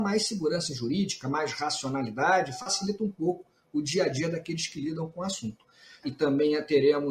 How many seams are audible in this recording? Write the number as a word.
one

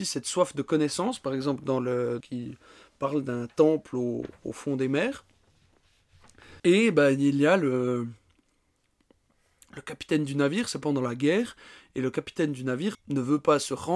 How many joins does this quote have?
three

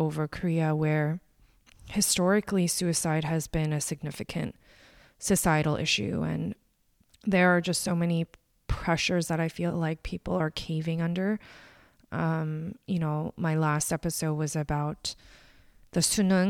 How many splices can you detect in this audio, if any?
zero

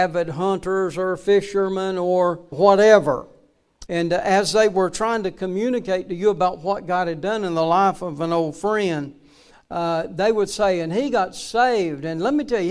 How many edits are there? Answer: two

